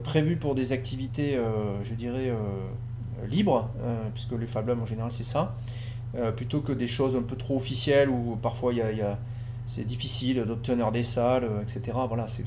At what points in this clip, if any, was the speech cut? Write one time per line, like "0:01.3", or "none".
none